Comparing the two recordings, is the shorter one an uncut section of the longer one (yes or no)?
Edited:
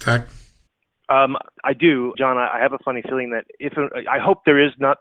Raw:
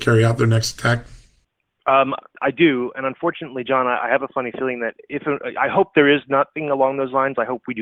no